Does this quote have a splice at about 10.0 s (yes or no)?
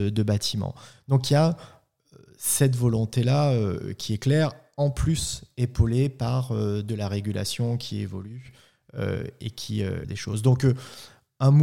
yes